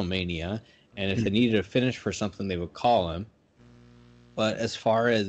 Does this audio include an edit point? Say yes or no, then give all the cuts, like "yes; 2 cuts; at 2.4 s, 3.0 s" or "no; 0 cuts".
no; 0 cuts